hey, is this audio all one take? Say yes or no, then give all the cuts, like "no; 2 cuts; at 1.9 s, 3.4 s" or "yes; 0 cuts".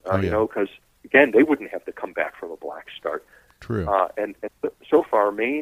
yes; 0 cuts